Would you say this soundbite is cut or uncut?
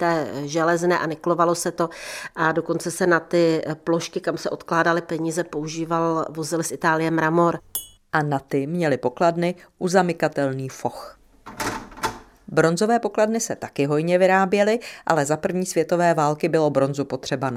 cut